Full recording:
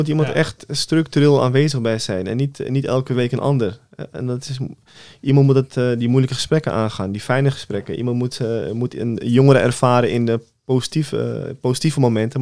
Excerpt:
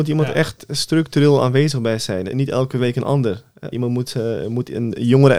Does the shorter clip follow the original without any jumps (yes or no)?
no